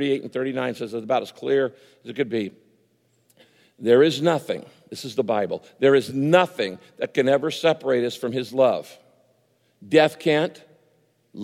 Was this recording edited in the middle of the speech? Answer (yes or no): no